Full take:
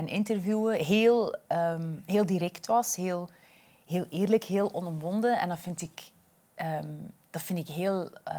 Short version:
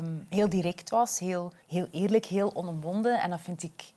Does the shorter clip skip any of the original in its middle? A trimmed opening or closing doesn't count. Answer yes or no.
yes